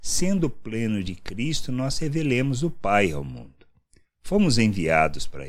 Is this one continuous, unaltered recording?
yes; 0 cuts

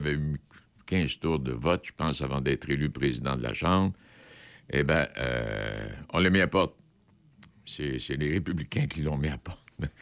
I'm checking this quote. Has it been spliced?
no; 0 cuts

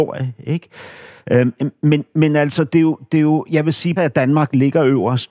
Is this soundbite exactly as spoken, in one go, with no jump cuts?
no; 1 cut; at 4.0 s

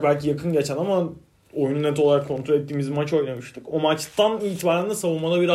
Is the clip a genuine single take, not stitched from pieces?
yes; 0 cuts

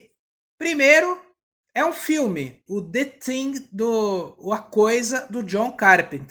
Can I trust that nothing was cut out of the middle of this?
no; 1 cut; at 2.7 s

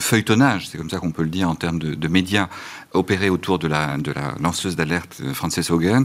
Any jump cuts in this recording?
no; 0 cuts

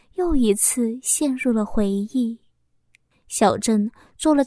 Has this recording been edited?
yes; 1 cut; at 3.1 s

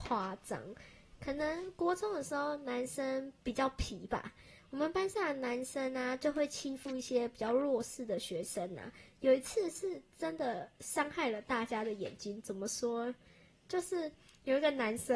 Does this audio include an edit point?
no; 0 cuts

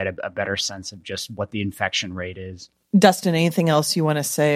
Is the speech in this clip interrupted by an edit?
no; 0 cuts

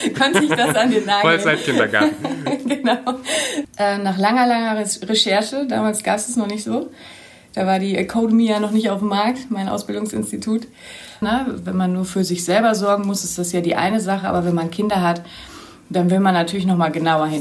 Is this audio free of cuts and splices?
no; 2 cuts; at 3.6 s, 11.2 s

